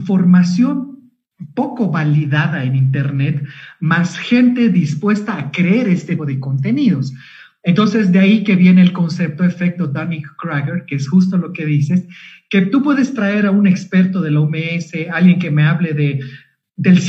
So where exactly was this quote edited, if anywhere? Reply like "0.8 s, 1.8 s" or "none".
6.2 s